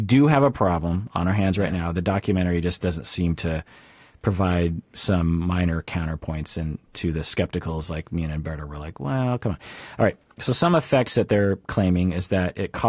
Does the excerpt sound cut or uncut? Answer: uncut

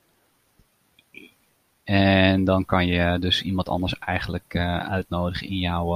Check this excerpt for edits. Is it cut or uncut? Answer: cut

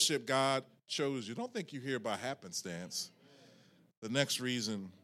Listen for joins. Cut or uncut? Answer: uncut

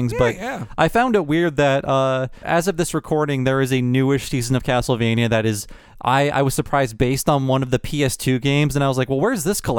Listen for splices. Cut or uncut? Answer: cut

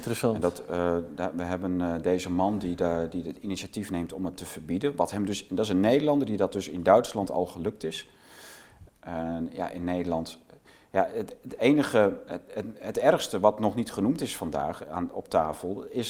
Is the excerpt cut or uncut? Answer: cut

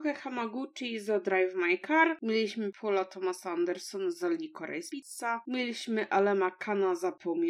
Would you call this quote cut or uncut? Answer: uncut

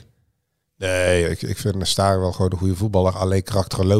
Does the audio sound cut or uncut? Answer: uncut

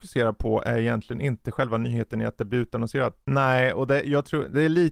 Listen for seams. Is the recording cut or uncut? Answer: cut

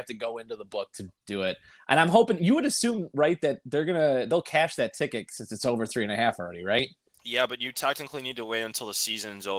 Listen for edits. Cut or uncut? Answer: uncut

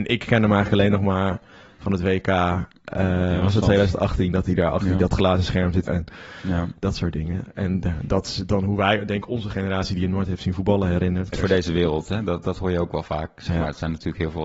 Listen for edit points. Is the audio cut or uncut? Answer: cut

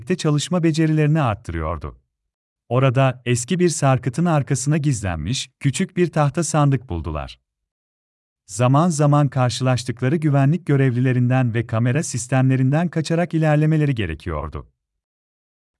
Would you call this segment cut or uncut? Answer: cut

